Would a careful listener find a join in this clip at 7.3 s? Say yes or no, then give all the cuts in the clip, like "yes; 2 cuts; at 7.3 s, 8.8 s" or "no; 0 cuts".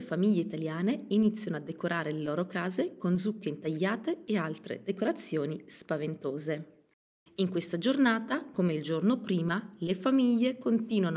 yes; 1 cut; at 7.3 s